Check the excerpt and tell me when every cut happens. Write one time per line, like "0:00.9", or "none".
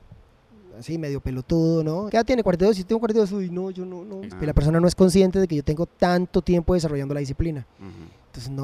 0:02.1
0:04.3